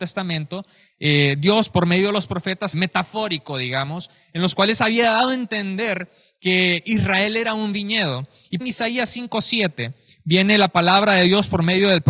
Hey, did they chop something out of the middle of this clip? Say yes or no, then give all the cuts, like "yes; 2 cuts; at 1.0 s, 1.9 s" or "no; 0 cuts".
yes; 2 cuts; at 2.7 s, 8.6 s